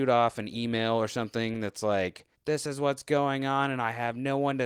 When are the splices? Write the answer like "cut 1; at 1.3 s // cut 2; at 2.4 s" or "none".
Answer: cut 1; at 2.3 s